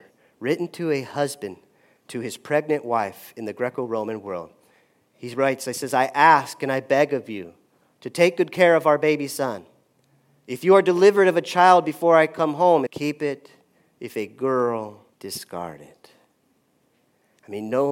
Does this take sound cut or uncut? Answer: cut